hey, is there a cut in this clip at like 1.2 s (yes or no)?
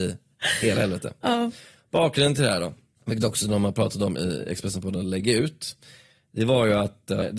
no